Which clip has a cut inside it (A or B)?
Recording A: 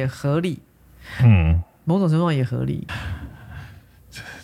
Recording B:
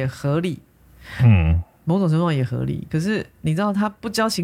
A